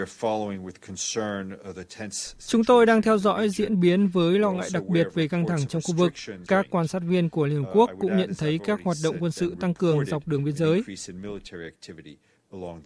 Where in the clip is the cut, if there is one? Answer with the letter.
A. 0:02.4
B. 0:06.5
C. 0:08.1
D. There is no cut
B